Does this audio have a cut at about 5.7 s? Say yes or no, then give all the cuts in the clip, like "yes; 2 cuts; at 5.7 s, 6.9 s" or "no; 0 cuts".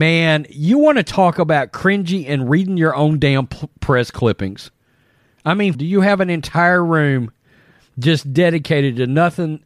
yes; 1 cut; at 5.7 s